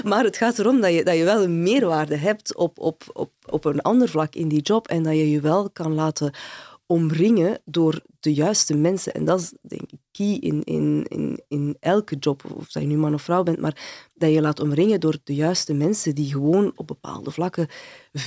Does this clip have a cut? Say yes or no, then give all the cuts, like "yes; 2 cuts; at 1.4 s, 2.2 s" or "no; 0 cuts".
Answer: no; 0 cuts